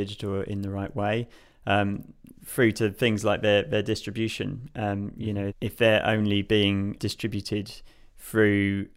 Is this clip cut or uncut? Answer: cut